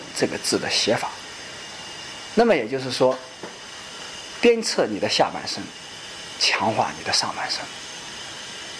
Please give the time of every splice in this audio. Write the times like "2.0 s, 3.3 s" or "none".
none